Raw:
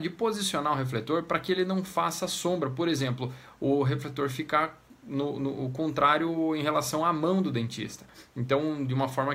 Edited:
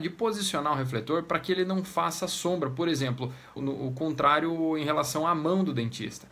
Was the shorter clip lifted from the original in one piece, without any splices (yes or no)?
no